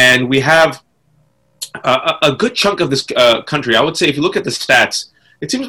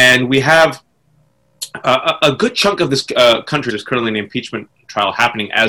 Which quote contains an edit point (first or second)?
second